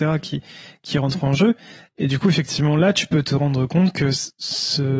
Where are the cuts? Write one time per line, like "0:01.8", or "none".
none